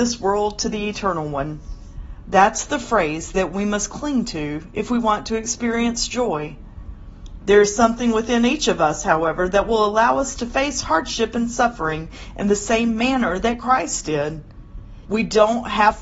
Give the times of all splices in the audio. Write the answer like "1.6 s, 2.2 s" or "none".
2.2 s, 7.4 s, 15.1 s